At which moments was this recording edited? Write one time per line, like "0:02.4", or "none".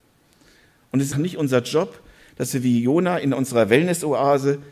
0:01.1